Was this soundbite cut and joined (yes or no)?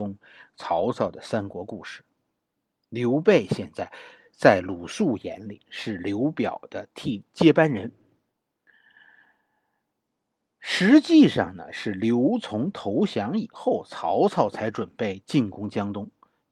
no